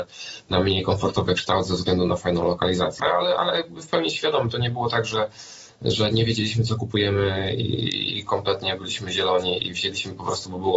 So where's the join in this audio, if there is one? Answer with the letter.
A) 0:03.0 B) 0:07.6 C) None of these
A